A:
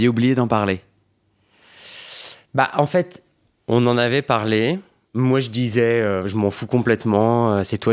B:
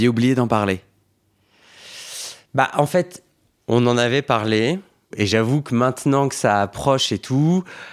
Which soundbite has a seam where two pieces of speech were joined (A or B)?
B